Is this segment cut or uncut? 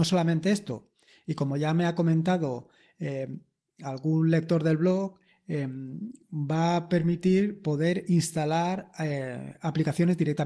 uncut